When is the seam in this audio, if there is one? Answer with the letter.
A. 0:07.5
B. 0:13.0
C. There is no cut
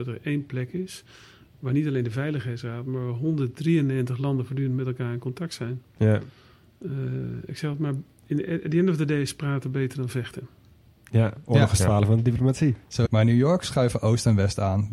B